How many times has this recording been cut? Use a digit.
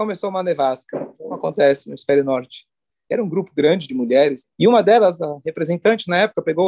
2